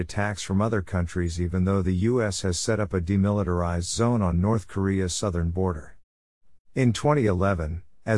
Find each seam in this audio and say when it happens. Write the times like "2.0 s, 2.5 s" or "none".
6.6 s